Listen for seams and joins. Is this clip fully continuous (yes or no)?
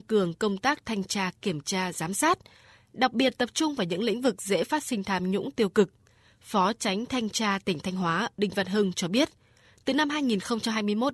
yes